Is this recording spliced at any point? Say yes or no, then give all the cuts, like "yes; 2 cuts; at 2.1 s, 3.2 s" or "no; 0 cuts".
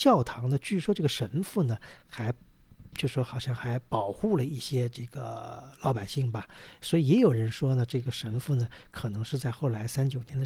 no; 0 cuts